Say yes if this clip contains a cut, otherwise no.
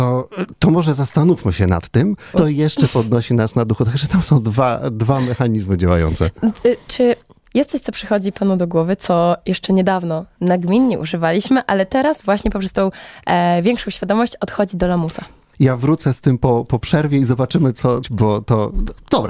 yes